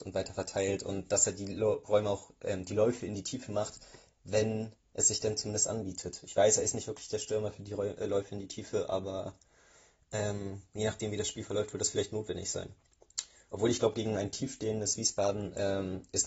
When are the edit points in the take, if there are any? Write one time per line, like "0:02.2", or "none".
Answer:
none